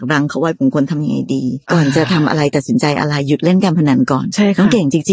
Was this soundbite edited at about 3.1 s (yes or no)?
no